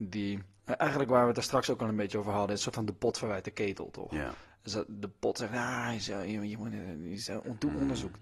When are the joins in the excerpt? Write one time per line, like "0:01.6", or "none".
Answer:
none